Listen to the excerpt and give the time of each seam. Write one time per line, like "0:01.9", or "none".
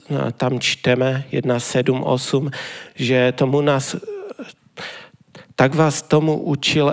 none